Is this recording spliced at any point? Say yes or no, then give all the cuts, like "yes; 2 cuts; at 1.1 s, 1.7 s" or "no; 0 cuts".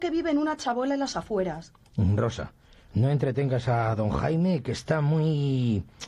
no; 0 cuts